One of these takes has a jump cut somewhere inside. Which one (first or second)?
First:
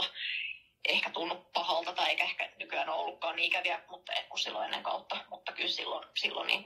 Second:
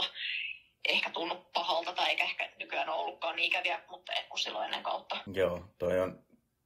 second